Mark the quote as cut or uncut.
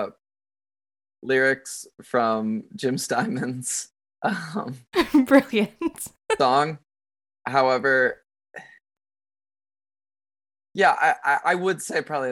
uncut